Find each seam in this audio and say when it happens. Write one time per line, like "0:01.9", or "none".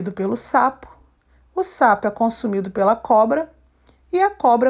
none